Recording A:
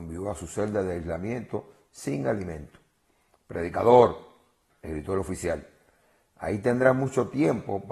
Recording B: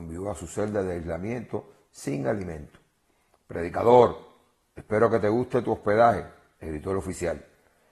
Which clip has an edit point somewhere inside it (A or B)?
A